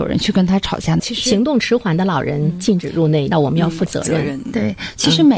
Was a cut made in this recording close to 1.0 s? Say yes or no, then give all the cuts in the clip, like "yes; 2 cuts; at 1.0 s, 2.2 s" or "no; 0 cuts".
yes; 2 cuts; at 1.0 s, 3.3 s